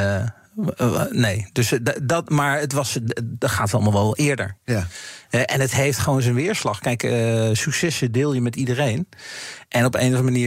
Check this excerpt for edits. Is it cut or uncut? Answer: uncut